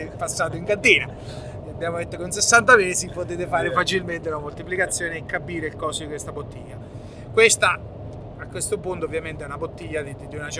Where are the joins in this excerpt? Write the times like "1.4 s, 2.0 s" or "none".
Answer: none